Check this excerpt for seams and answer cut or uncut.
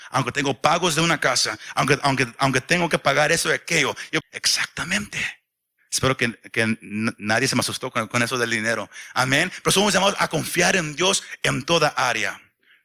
cut